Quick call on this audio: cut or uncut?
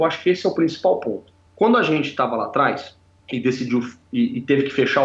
uncut